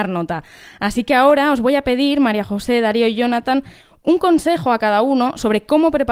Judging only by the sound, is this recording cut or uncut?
uncut